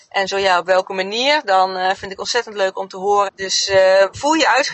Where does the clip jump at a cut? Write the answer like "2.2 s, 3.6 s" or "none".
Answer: 3.3 s